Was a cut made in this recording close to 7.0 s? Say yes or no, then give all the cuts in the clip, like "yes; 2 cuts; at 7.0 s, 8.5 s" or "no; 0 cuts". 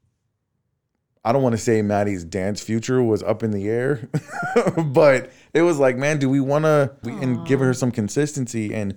yes; 1 cut; at 7.0 s